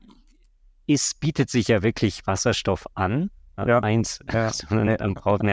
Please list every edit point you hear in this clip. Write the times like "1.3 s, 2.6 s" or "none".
3.8 s